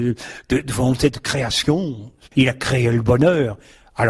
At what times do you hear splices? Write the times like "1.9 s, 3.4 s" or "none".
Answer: 2.3 s